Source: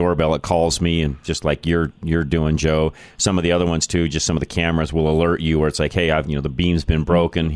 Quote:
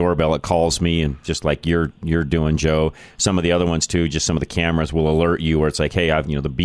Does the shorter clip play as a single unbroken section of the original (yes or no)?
yes